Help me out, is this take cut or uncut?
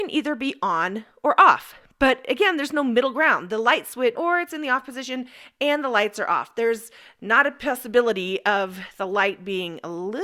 cut